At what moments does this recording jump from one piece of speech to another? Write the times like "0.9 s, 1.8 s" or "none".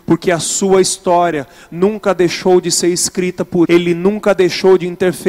3.7 s